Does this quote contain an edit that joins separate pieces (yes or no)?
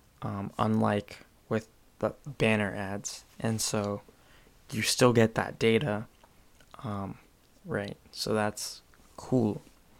yes